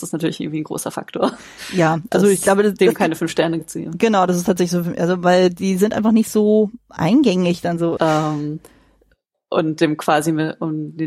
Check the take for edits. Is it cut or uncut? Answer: cut